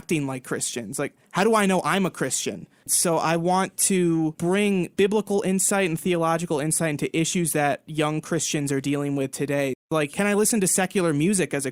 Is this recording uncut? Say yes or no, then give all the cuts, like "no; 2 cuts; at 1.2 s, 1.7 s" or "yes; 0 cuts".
no; 1 cut; at 2.8 s